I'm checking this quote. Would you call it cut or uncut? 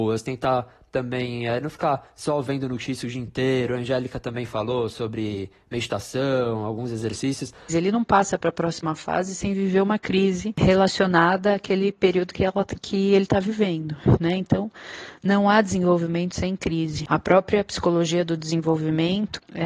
cut